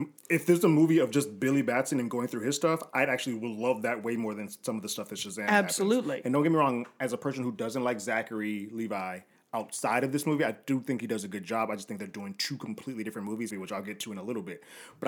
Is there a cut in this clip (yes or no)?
yes